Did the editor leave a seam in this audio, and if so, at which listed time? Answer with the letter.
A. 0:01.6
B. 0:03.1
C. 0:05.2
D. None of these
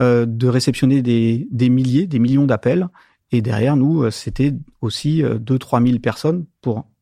D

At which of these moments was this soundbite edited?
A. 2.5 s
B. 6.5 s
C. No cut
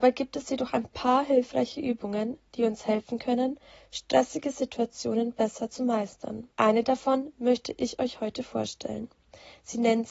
B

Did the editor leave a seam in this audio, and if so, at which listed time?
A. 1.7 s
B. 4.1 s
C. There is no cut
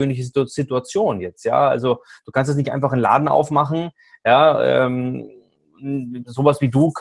C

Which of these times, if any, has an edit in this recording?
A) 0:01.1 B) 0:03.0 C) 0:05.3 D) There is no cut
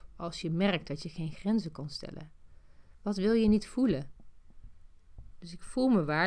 C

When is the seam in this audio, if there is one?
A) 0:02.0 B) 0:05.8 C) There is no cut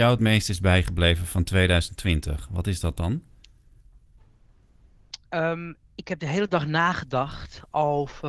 B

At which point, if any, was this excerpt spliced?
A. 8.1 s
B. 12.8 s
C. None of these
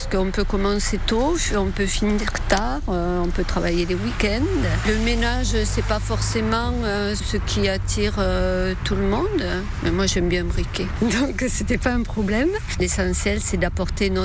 B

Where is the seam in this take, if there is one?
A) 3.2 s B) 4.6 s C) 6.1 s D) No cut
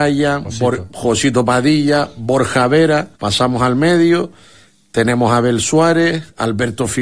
A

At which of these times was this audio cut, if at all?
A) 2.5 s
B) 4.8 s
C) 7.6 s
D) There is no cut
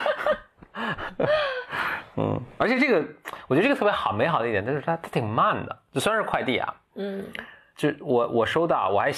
D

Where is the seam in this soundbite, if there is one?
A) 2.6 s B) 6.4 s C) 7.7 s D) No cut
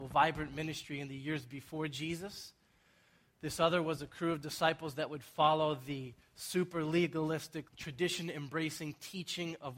C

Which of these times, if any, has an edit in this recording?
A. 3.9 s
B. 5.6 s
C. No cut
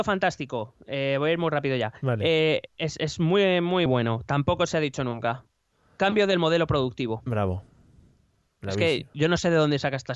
A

